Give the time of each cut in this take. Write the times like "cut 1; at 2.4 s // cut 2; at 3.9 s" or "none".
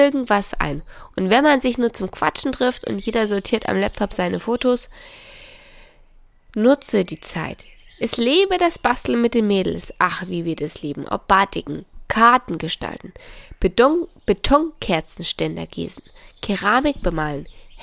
cut 1; at 7.8 s